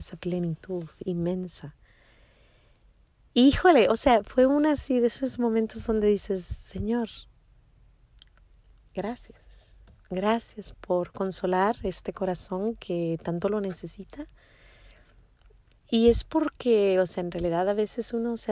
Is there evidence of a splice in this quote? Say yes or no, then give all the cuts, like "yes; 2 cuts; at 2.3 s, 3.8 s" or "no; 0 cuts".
yes; 1 cut; at 10.7 s